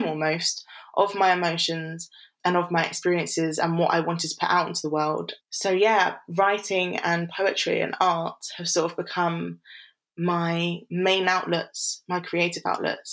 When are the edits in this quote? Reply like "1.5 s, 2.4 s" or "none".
5.4 s